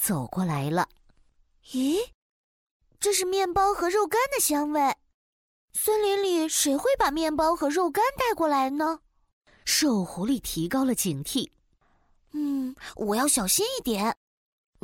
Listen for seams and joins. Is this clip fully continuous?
yes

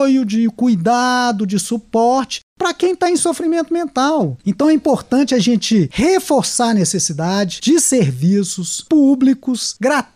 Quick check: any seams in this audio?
no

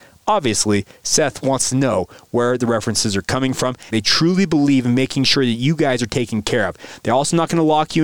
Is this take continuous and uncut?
no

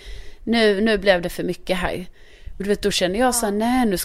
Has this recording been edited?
no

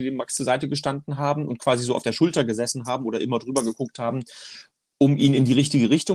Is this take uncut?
yes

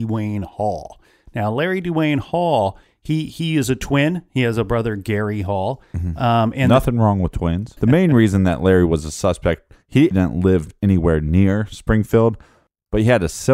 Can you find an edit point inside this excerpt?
yes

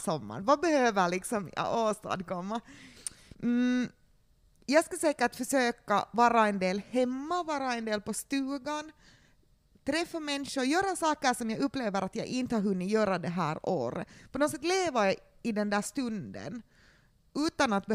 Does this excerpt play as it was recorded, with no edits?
no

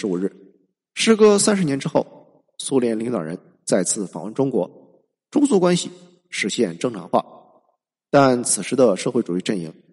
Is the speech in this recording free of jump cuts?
yes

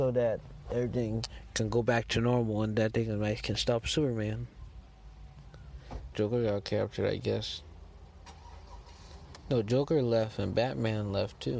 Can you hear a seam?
yes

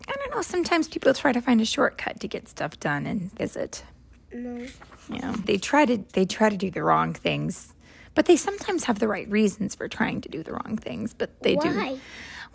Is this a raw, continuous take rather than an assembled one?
no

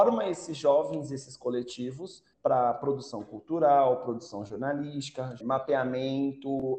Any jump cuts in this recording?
yes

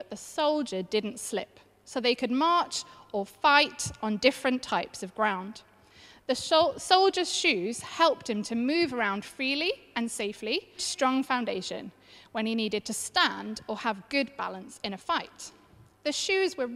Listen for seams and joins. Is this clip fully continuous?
no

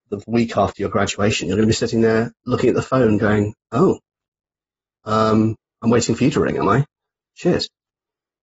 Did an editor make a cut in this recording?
no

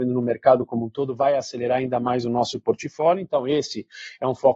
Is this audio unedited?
yes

